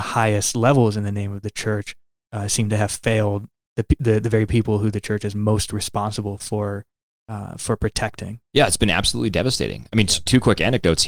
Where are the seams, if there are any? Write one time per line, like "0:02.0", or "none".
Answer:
none